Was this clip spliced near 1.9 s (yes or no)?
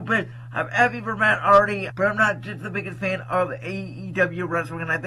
yes